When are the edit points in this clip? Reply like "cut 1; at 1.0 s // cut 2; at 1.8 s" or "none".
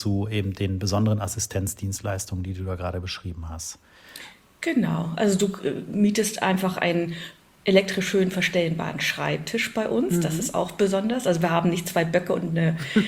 none